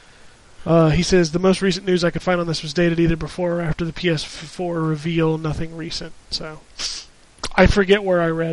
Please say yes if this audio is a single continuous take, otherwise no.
no